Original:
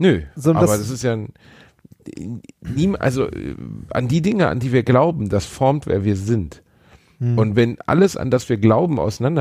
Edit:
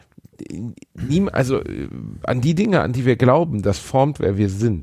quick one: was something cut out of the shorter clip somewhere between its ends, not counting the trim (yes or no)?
no